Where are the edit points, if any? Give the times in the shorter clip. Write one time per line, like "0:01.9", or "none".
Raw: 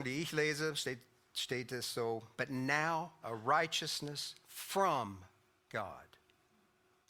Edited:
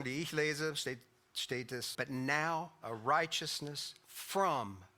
0:01.9